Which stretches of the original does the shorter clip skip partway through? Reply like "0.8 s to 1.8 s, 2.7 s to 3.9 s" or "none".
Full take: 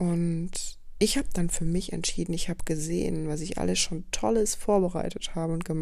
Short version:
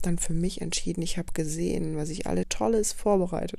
3.7 s to 4.1 s

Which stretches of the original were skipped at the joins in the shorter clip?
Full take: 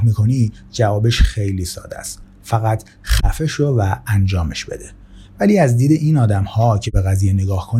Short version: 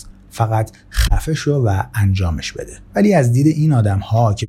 5.0 s to 5.3 s

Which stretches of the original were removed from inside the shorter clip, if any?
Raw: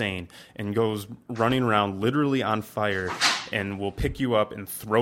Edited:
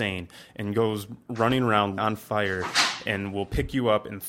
2.0 s to 2.4 s

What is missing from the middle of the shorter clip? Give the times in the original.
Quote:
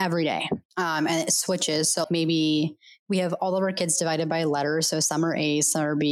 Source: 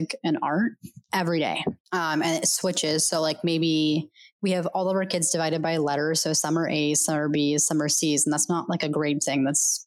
3.2 s to 3.4 s

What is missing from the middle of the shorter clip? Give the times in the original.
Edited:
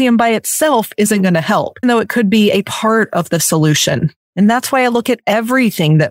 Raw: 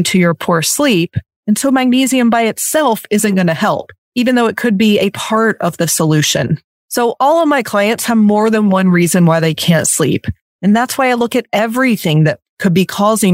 4.0 s to 4.3 s, 6.7 s to 10.5 s

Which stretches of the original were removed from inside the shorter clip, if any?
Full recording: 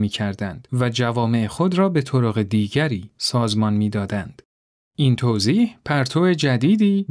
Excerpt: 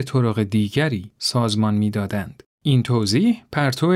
4.5 s to 4.9 s

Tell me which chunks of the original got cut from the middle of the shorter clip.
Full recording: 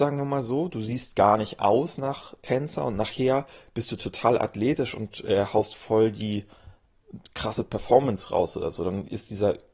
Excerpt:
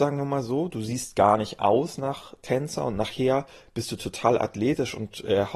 none

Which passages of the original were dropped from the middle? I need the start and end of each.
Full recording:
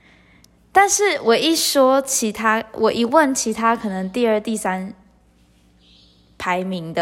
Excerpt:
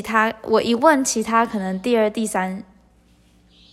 none

